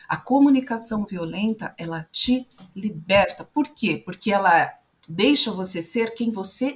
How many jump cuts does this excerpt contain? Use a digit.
0